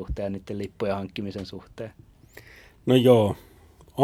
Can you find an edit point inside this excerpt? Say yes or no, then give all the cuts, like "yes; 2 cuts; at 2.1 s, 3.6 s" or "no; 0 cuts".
no; 0 cuts